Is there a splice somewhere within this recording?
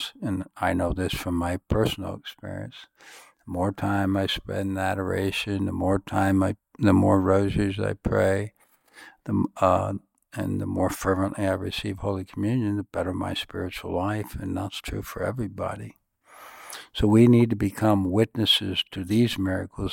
no; 0 cuts

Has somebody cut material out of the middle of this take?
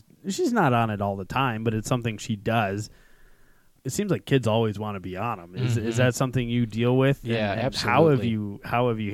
no; 0 cuts

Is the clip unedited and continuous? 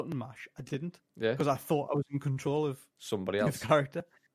no; 1 cut; at 1.1 s

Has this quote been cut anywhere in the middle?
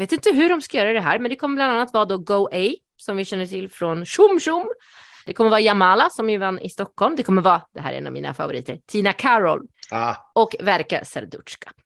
no; 0 cuts

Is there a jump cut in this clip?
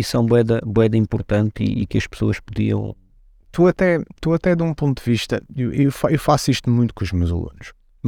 no; 0 cuts

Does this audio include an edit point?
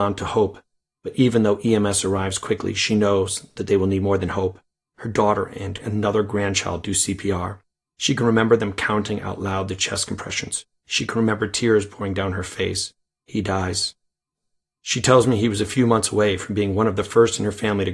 no; 0 cuts

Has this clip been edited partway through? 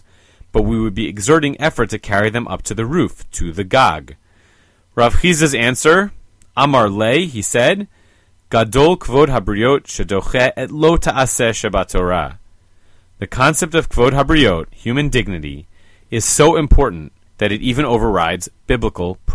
yes; 1 cut; at 17.3 s

